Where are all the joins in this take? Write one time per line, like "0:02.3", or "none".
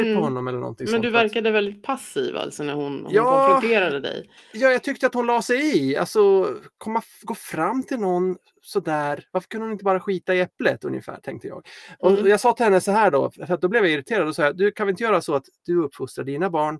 none